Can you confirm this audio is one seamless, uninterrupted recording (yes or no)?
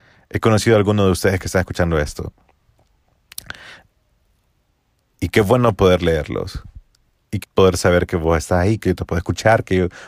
no